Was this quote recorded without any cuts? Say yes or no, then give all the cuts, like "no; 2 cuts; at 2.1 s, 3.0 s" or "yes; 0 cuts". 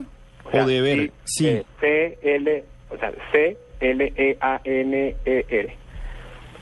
no; 1 cut; at 3.7 s